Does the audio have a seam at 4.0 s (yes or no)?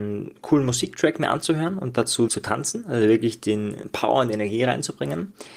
no